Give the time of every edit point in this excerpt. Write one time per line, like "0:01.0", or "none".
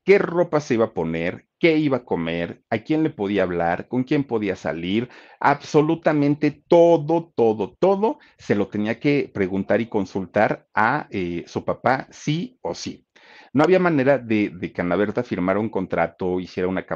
0:07.3
0:13.4